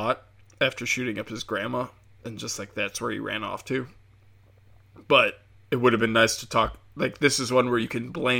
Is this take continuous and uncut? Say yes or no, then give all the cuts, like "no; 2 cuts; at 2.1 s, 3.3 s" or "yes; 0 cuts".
yes; 0 cuts